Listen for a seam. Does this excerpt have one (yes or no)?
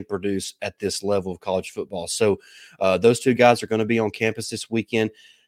no